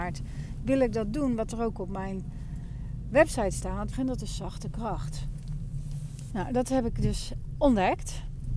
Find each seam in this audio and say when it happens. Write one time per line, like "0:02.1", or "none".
0:03.9
0:06.3